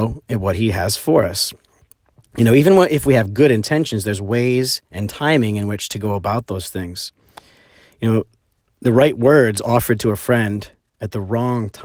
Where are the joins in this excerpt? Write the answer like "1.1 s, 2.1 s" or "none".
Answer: none